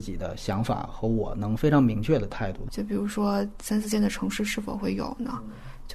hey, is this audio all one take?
no; 1 cut; at 2.7 s

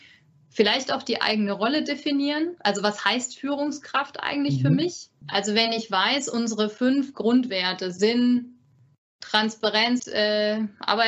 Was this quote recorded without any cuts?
no; 2 cuts; at 5.2 s, 10.0 s

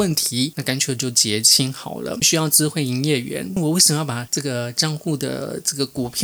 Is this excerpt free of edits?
no; 2 cuts; at 2.2 s, 3.6 s

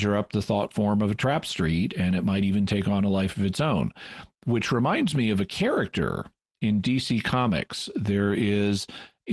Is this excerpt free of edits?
yes; 0 cuts

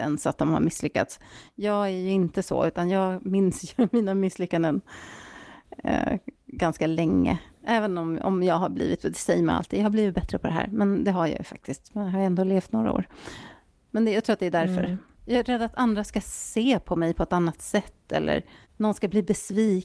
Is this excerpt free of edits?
yes; 0 cuts

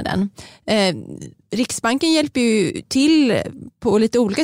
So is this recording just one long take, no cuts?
yes; 0 cuts

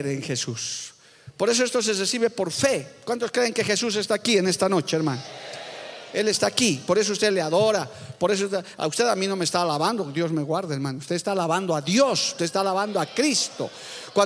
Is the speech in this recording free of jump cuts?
yes; 0 cuts

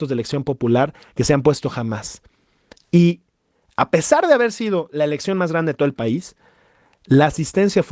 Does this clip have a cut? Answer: no; 0 cuts

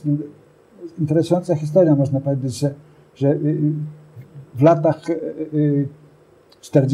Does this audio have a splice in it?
no; 0 cuts

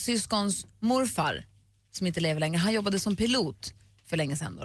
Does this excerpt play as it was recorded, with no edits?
yes; 0 cuts

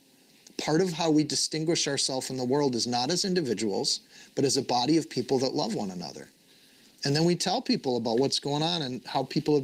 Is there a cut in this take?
no; 0 cuts

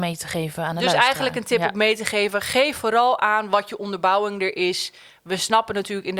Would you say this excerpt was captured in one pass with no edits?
yes; 0 cuts

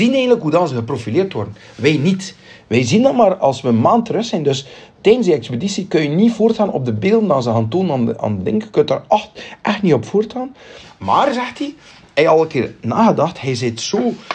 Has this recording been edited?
yes; 1 cut; at 10.8 s

